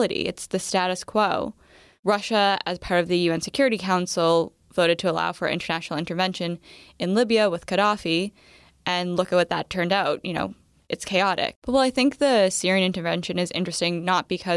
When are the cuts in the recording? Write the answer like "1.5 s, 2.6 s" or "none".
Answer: 11.6 s